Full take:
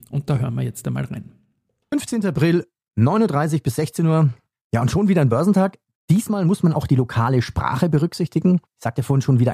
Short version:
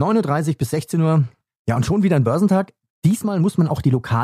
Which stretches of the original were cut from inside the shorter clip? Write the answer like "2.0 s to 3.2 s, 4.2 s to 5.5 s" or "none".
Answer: none